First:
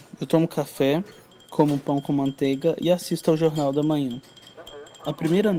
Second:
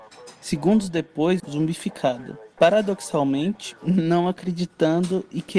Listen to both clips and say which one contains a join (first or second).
second